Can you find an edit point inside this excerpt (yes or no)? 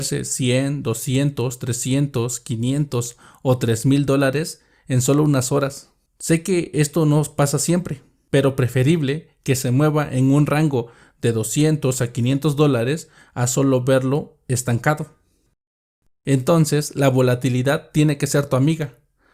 no